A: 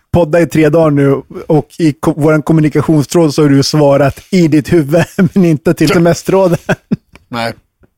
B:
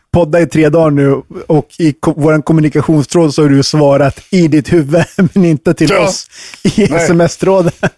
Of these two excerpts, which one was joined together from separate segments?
A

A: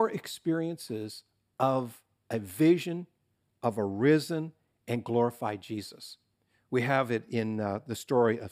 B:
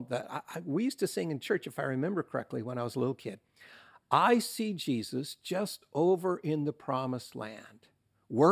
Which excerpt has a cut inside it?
B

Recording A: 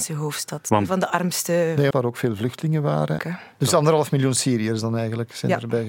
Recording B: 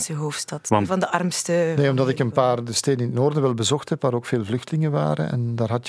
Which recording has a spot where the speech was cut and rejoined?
A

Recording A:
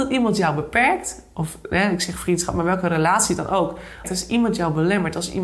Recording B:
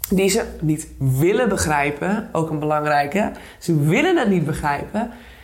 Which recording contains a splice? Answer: A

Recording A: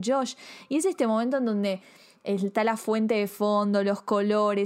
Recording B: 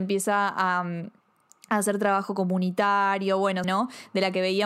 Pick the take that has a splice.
B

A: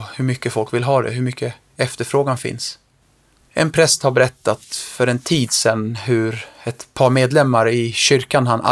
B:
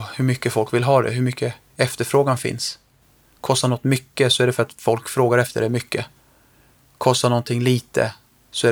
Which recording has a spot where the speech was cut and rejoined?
A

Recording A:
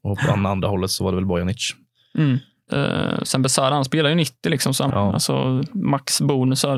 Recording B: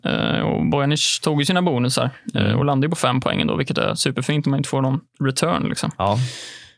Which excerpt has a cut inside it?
A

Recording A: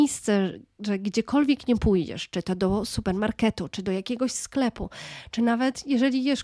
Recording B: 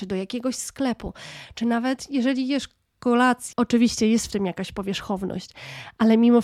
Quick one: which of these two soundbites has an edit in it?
B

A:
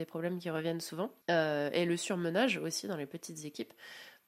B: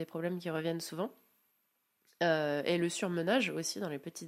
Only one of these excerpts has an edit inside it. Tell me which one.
A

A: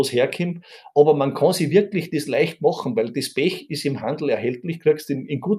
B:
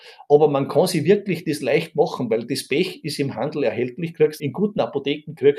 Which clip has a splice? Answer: B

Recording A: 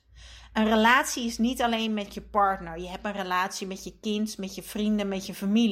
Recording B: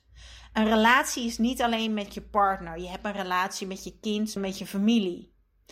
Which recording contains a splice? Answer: B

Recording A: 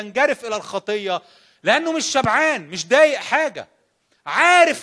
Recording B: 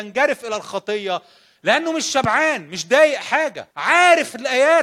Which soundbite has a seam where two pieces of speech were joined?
B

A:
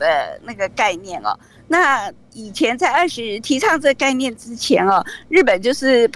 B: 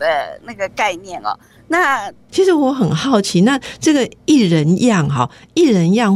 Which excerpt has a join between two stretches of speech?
B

